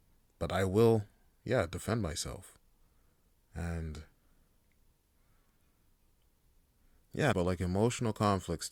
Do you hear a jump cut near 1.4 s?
no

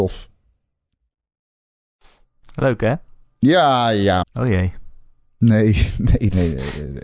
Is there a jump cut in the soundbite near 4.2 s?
yes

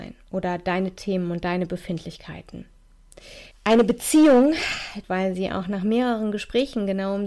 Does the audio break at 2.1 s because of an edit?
no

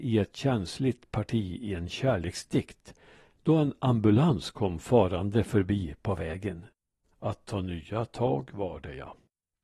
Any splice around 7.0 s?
yes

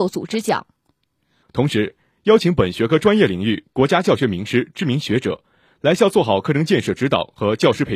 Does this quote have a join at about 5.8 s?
no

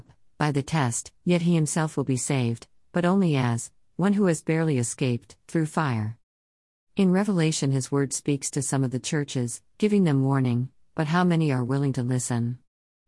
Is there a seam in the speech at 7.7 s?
no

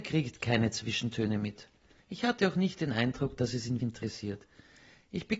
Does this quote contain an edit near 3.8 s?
yes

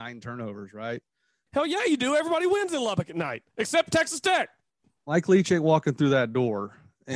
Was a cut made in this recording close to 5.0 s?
no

